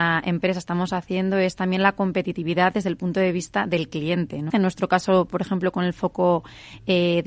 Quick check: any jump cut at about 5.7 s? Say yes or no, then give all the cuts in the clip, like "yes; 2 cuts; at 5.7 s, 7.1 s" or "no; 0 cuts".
no; 1 cut; at 4.5 s